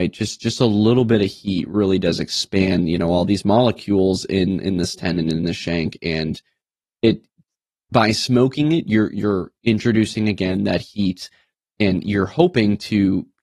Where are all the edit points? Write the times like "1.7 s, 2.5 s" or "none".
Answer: none